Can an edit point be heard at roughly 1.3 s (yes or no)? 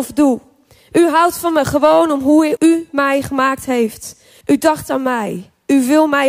no